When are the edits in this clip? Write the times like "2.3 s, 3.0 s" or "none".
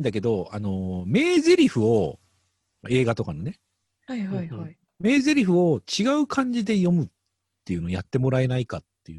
none